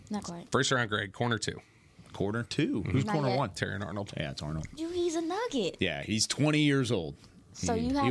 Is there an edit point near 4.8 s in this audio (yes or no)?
yes